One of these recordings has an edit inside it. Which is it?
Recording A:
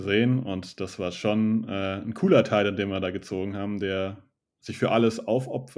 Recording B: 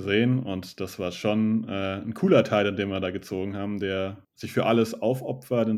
B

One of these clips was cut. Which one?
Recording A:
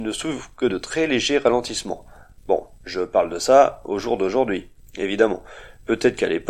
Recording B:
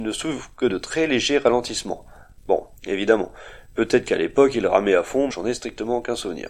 B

